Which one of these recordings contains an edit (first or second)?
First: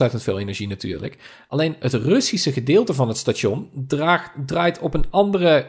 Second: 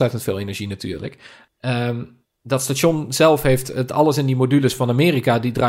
second